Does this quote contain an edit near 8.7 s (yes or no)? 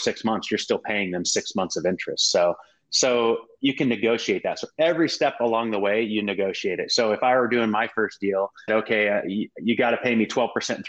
yes